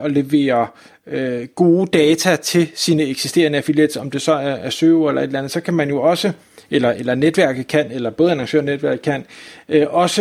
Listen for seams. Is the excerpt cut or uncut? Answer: uncut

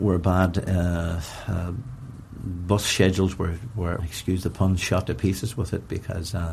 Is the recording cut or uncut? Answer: cut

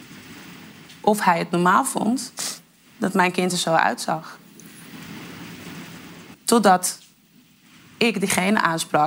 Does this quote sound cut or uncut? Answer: cut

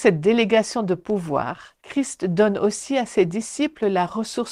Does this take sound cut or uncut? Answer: cut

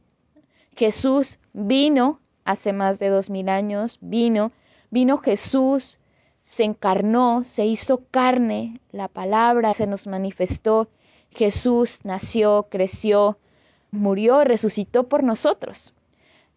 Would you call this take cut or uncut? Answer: cut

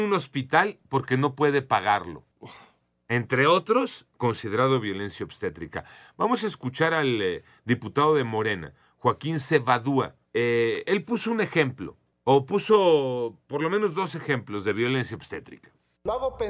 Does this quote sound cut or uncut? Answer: uncut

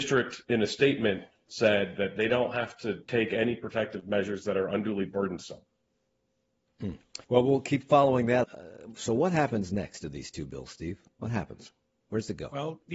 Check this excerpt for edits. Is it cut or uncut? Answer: cut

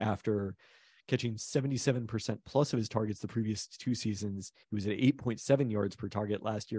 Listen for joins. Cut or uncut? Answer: uncut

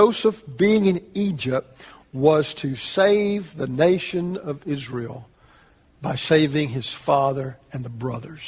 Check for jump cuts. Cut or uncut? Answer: uncut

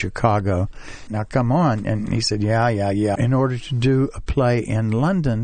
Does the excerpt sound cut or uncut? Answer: cut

